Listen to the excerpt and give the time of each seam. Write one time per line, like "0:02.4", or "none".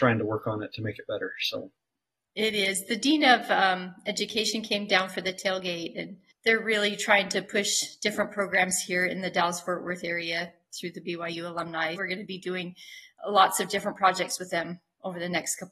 0:12.0